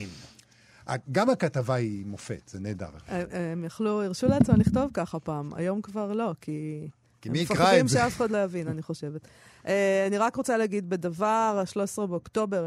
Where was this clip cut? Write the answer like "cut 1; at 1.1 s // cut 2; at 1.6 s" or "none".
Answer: cut 1; at 3.0 s